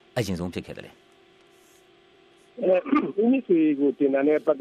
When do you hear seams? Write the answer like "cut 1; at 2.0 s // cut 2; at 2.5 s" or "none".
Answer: none